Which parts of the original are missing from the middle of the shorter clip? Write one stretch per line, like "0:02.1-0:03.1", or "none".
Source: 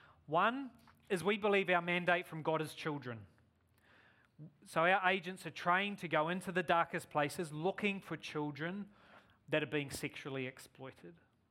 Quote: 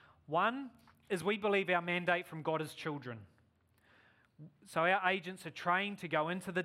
none